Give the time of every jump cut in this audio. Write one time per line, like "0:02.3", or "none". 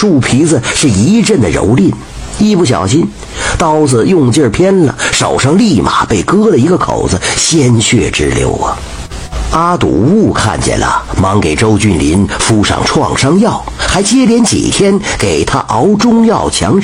none